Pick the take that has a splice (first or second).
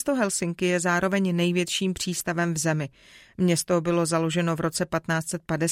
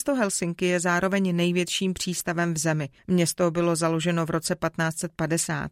second